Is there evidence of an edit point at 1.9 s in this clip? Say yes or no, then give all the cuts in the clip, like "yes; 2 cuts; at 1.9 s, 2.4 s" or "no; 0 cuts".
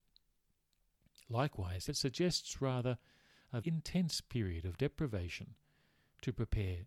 yes; 2 cuts; at 1.9 s, 3.6 s